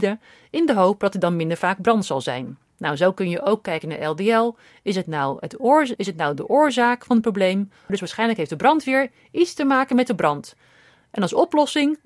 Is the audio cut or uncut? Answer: cut